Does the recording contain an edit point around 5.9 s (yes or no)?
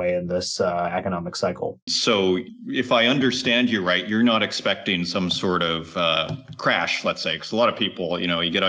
no